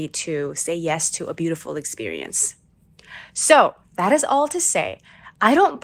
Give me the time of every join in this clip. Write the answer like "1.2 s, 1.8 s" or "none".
none